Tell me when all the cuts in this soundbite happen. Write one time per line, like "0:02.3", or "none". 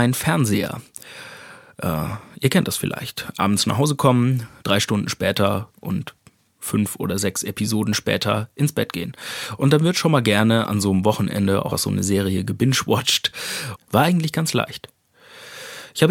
0:04.6
0:11.7
0:13.8